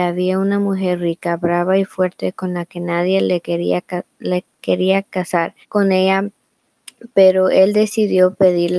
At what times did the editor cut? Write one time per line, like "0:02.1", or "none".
0:05.6